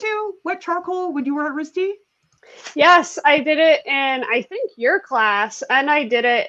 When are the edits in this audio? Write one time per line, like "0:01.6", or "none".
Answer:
none